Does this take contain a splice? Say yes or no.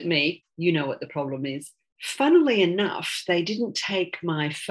yes